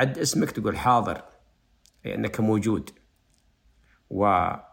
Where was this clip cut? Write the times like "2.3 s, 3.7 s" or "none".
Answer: none